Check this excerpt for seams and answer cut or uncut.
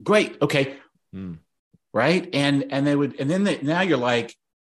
cut